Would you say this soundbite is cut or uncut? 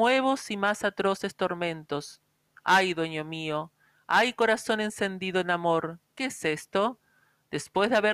uncut